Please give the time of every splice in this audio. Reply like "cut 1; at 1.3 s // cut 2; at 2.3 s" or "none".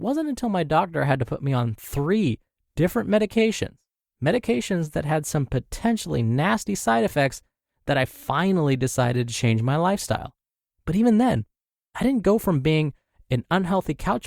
none